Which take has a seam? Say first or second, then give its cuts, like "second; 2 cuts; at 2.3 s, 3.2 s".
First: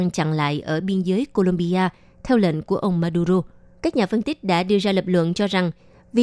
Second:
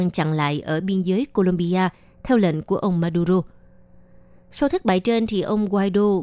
first; 1 cut; at 3.7 s